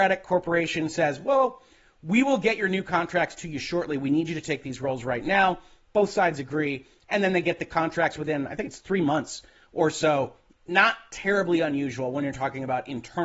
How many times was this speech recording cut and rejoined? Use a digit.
0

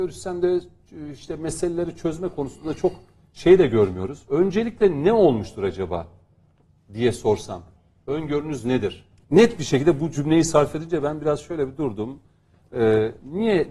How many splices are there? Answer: 2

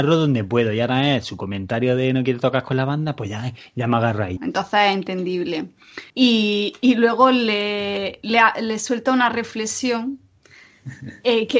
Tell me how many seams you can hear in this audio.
2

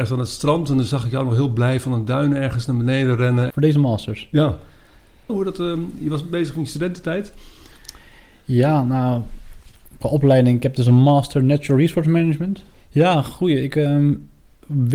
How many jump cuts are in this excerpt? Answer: 3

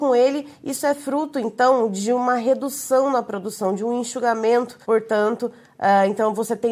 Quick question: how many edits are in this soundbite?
1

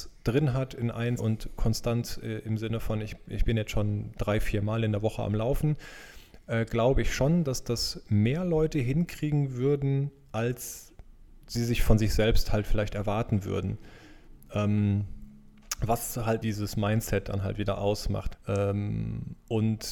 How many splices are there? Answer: 3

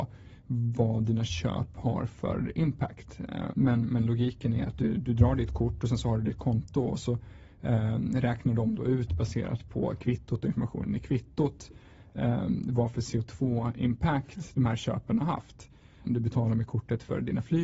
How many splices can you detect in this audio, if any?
2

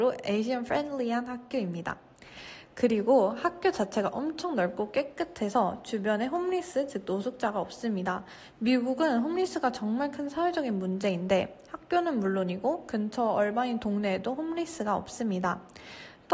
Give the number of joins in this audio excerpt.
0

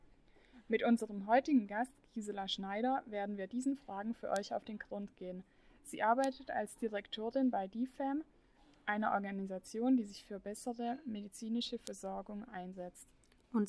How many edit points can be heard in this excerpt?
0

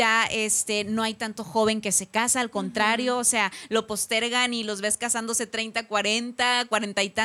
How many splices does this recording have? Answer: 0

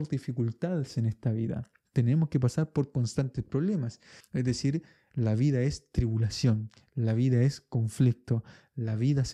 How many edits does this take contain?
1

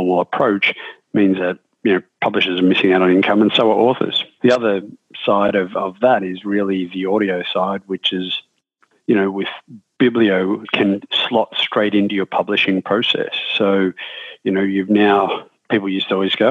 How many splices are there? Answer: 0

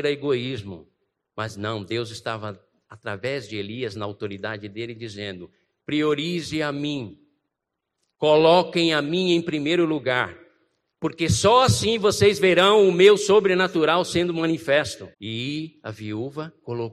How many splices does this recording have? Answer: 1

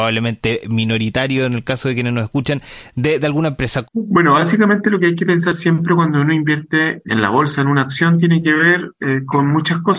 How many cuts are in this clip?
2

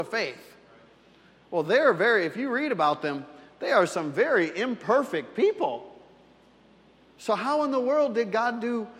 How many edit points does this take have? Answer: 0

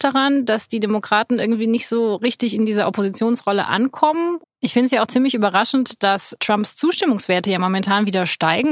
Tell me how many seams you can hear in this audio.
1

